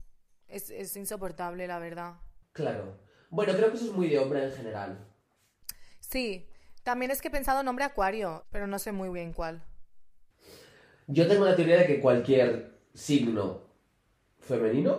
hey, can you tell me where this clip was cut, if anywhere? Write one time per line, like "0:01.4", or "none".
0:08.4